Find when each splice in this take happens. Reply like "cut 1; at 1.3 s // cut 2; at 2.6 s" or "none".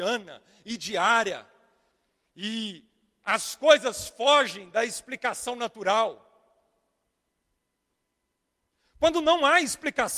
none